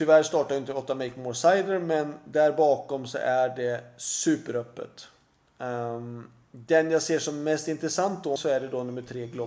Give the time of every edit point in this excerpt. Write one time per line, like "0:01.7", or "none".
0:08.4